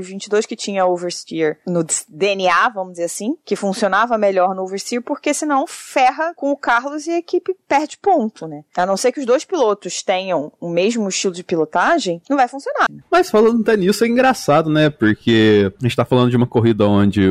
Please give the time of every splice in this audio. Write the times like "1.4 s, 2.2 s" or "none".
12.9 s